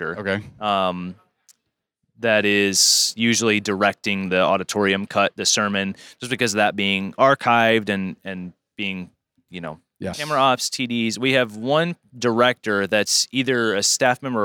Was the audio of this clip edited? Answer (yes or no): yes